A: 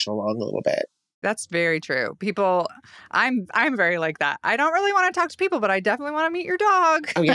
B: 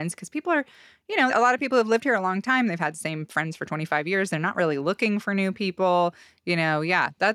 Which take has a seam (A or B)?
B